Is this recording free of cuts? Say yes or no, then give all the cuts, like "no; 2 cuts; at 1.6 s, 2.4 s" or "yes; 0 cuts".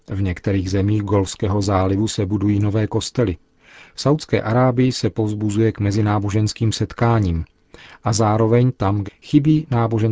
no; 1 cut; at 9.1 s